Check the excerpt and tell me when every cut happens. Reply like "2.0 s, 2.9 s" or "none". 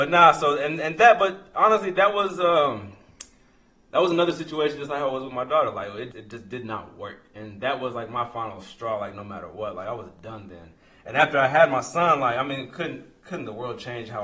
6.1 s